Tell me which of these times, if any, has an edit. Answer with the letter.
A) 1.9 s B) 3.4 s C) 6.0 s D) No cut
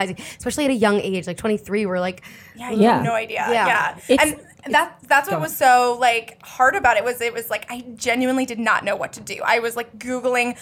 D